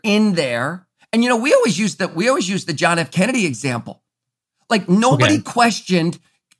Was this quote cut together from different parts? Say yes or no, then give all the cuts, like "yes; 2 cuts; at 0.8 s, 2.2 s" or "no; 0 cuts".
no; 0 cuts